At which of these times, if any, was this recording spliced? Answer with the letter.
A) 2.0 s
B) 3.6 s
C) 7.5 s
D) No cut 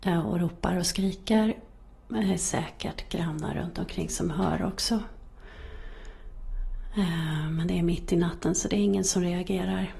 A